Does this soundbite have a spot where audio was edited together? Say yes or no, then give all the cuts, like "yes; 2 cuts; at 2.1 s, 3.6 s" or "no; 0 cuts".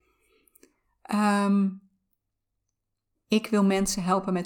yes; 1 cut; at 3.2 s